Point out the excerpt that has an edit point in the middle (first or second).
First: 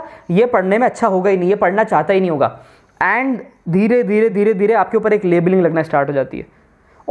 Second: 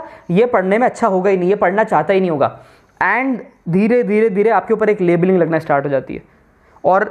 second